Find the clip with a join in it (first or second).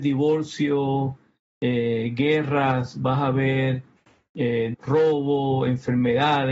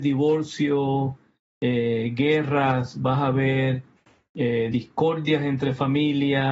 first